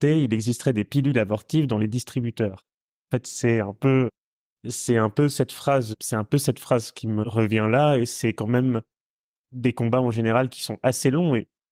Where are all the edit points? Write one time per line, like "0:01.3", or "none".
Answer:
none